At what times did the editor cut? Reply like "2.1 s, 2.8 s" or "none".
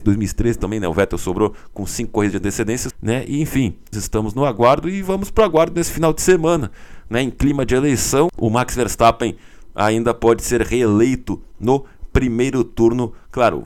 2.9 s, 3.9 s